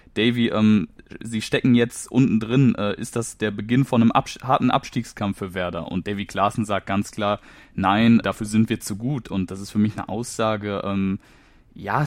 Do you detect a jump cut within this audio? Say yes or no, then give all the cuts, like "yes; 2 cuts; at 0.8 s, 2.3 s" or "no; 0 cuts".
yes; 1 cut; at 8.2 s